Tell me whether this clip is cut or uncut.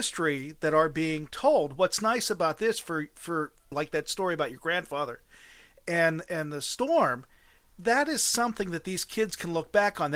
cut